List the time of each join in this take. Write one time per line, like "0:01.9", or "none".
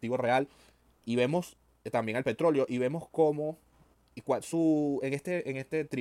none